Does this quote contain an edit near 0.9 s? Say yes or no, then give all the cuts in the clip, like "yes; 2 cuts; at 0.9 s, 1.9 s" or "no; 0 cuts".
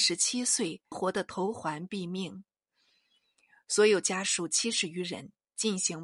yes; 1 cut; at 0.9 s